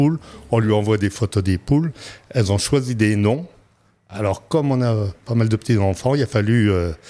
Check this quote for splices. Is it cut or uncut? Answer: uncut